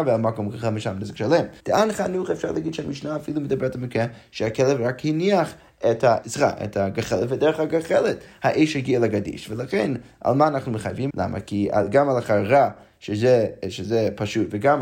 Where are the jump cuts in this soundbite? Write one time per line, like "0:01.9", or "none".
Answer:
0:01.6
0:06.2
0:11.1